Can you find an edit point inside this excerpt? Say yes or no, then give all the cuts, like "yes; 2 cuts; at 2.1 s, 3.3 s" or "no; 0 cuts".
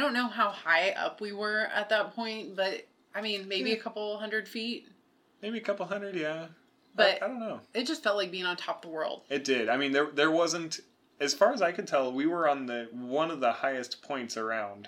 no; 0 cuts